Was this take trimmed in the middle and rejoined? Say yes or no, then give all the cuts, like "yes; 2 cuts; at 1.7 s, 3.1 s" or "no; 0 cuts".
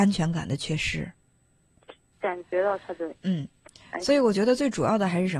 yes; 1 cut; at 2.1 s